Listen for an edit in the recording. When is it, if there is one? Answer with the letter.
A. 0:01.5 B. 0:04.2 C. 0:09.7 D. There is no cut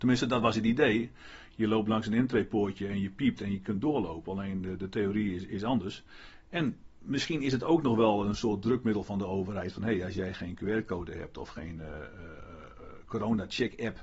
D